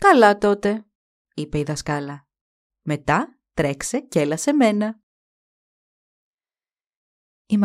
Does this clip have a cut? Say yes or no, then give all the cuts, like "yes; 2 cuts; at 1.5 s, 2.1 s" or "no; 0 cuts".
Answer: yes; 1 cut; at 2.7 s